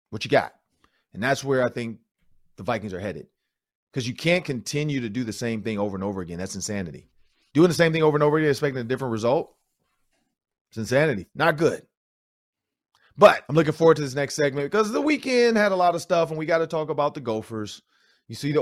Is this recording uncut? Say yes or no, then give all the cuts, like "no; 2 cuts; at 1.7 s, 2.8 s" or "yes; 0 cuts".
no; 2 cuts; at 11.3 s, 13.4 s